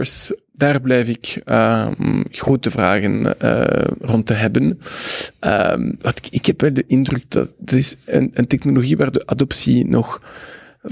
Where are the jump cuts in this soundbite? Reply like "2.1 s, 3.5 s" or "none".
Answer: none